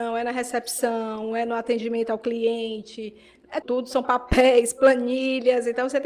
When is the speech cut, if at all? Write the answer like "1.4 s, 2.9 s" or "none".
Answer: 3.6 s